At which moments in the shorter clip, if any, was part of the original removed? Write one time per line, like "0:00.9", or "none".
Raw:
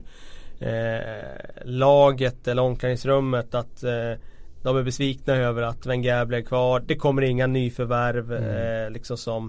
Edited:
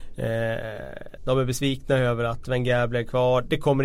0:01.2